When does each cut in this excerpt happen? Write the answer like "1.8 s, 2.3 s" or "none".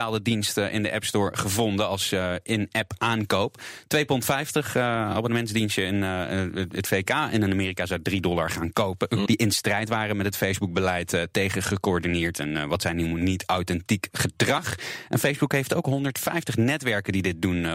9.3 s